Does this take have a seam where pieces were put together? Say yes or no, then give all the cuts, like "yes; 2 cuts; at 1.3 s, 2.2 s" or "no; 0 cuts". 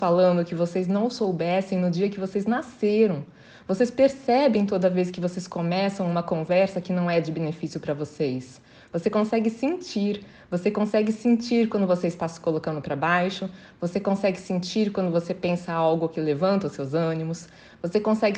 no; 0 cuts